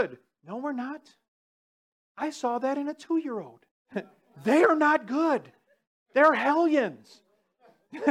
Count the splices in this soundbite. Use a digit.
1